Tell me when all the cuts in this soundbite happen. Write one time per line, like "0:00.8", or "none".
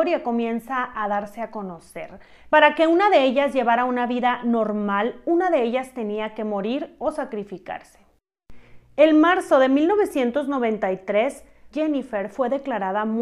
0:02.5
0:11.7